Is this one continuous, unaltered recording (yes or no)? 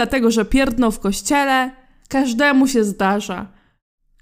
yes